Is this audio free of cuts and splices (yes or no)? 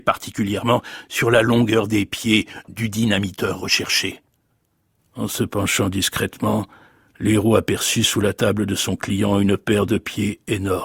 yes